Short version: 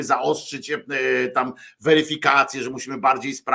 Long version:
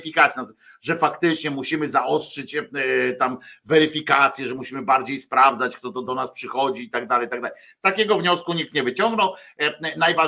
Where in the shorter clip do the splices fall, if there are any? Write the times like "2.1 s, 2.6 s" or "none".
none